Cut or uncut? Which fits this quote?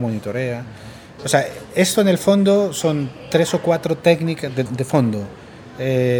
cut